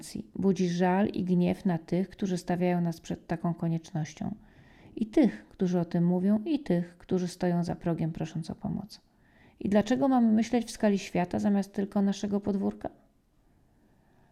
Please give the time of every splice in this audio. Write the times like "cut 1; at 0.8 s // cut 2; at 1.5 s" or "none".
none